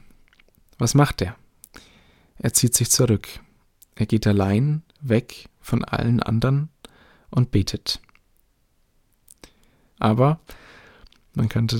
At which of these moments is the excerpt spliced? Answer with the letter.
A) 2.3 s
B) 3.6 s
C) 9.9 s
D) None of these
C